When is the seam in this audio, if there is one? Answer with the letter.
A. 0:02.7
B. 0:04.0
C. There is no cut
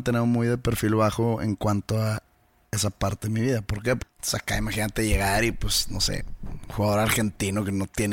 B